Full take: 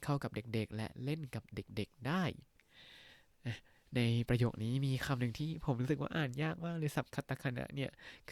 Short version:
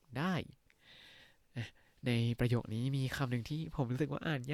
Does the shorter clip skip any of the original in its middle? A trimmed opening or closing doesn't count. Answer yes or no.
no